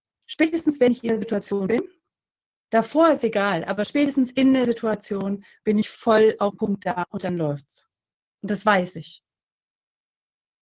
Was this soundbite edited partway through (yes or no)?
no